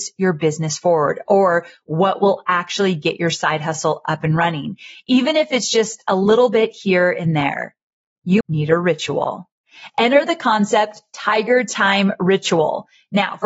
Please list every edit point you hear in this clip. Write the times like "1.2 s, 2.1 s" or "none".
8.4 s